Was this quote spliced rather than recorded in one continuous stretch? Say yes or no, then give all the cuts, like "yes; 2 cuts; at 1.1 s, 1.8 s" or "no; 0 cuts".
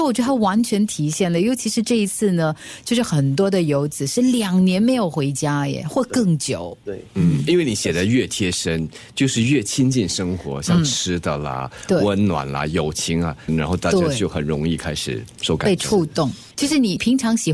yes; 2 cuts; at 13.5 s, 16.5 s